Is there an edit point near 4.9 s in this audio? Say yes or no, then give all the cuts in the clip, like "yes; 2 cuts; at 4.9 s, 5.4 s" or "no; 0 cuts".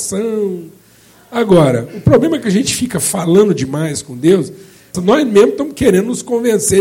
yes; 1 cut; at 4.9 s